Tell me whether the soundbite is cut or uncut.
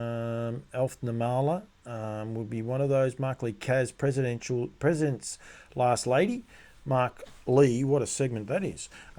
uncut